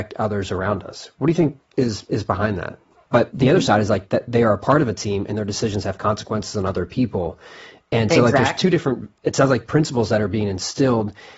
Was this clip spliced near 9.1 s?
no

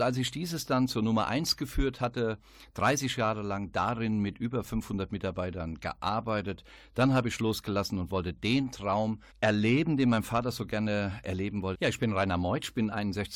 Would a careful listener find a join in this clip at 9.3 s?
yes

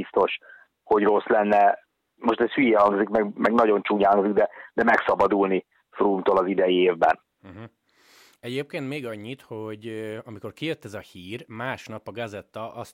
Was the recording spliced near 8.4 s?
no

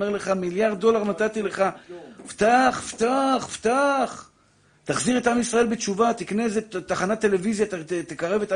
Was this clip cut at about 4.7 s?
no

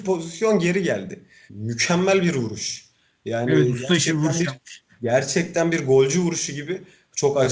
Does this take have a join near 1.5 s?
yes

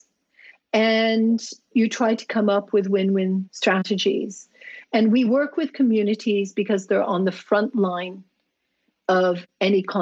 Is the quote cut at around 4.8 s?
yes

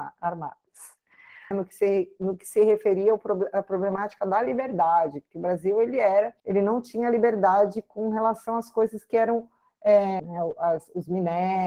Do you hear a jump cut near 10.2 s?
yes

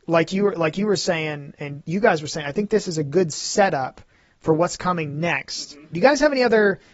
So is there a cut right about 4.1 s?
no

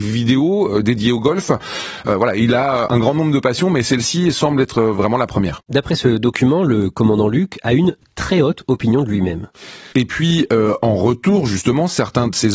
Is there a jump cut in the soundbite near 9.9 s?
yes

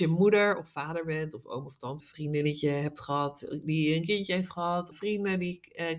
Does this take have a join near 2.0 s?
yes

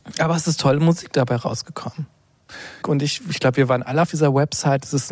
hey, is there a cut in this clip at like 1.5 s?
no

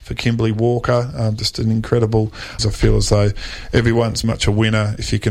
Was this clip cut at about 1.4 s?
no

